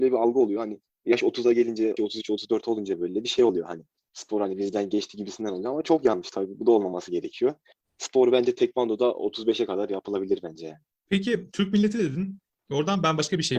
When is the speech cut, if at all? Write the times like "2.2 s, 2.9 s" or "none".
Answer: 2.0 s